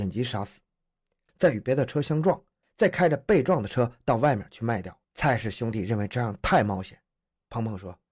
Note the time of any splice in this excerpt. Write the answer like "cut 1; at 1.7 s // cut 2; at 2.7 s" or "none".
cut 1; at 1.3 s // cut 2; at 2.6 s // cut 3; at 5.0 s